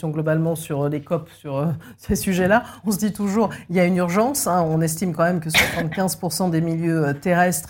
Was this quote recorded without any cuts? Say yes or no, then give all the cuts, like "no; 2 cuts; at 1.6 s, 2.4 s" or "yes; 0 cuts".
yes; 0 cuts